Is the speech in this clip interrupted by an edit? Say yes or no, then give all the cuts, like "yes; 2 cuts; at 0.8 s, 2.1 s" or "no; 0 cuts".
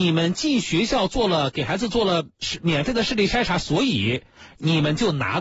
no; 0 cuts